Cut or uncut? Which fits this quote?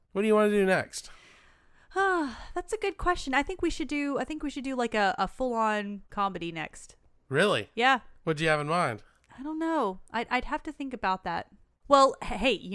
uncut